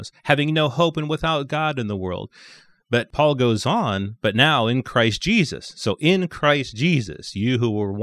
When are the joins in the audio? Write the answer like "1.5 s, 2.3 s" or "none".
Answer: none